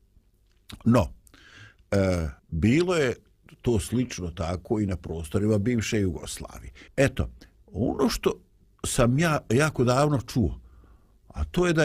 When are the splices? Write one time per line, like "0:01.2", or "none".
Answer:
0:02.4
0:06.9